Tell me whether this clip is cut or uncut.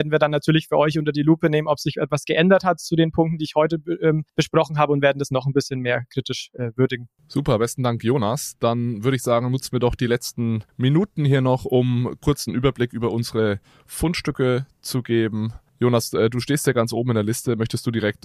uncut